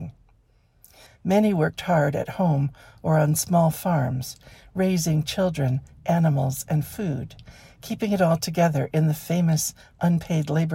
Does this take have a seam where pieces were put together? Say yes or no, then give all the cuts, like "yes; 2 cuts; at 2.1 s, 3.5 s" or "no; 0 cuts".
yes; 1 cut; at 1.1 s